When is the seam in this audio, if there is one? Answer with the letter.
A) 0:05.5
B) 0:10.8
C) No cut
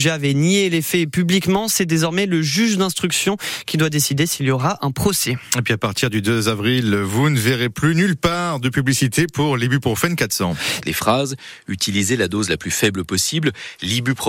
B